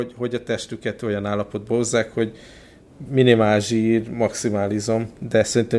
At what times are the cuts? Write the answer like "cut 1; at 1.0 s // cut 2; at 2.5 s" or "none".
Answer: none